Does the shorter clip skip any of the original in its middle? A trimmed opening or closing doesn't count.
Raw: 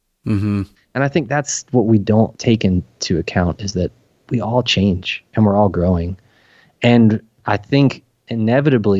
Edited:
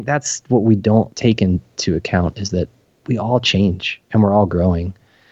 no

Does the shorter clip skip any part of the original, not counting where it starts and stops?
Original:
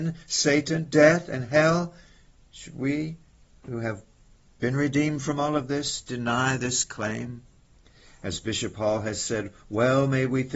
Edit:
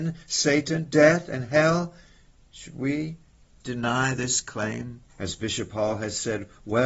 yes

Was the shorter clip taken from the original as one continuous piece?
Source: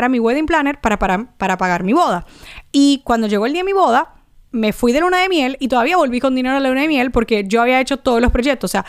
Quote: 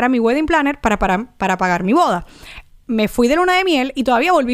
no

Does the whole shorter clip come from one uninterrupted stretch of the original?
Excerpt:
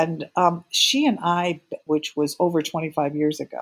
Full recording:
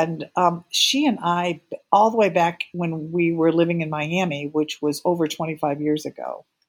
no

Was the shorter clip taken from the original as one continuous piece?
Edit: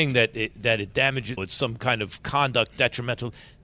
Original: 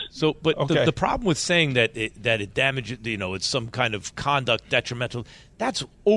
no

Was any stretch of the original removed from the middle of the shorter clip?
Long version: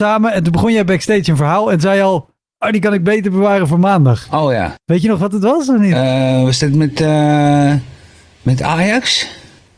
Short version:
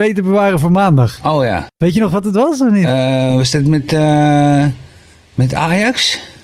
no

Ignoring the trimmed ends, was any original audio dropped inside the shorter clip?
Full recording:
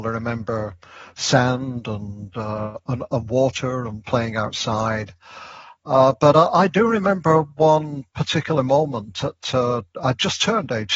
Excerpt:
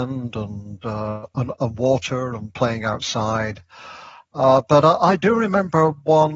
no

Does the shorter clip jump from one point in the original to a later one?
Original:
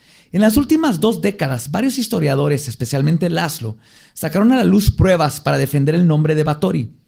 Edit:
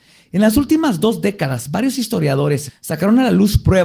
yes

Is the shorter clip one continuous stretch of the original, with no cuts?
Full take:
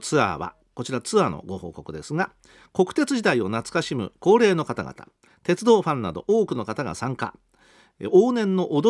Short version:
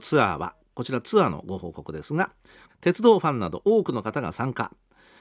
no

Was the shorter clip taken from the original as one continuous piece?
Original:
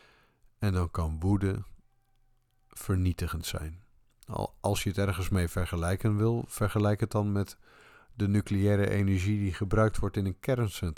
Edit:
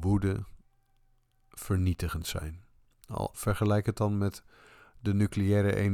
no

